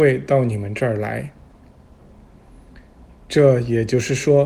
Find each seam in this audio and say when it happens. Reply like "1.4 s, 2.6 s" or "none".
none

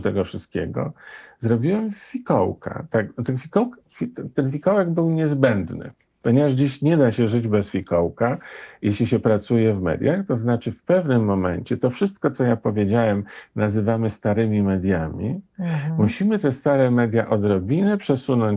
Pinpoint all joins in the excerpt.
none

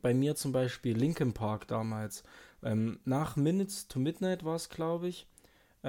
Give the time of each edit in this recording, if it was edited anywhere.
none

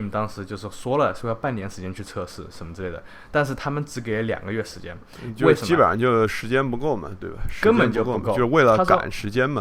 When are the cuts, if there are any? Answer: none

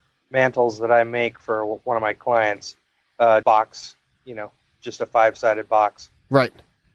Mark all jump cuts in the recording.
3.4 s

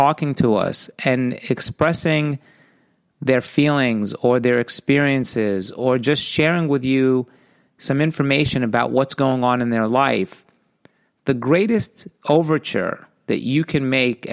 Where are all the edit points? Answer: 12.2 s

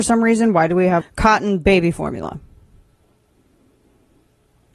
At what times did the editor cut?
1.0 s

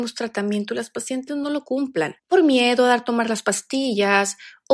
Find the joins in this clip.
2.2 s

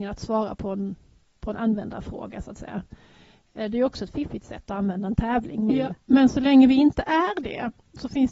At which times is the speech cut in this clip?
5.7 s

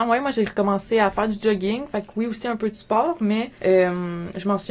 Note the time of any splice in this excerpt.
3.6 s

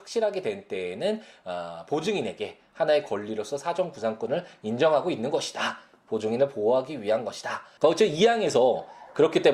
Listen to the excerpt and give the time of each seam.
7.8 s

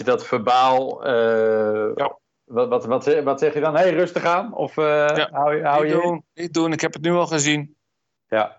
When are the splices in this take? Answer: none

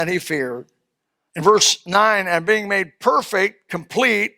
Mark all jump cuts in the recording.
1.3 s

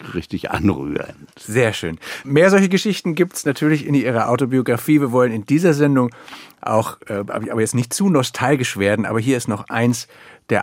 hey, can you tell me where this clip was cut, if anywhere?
none

